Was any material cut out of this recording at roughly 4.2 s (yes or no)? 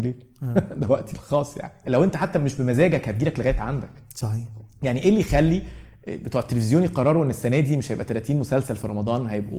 no